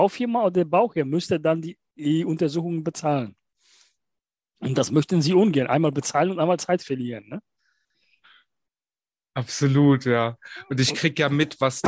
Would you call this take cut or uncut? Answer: uncut